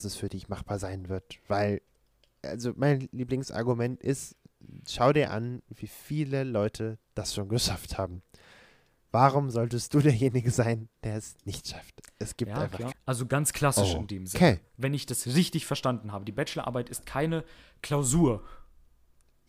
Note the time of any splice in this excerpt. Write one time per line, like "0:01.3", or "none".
0:12.9

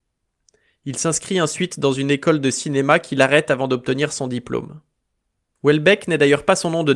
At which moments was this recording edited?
0:05.6

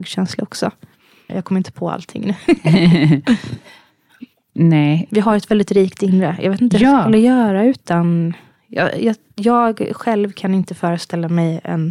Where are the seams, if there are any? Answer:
0:01.3

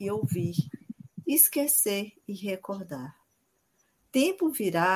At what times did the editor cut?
0:01.2

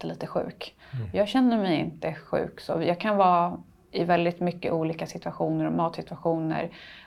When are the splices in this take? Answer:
none

